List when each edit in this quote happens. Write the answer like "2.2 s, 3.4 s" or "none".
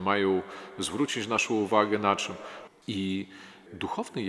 2.7 s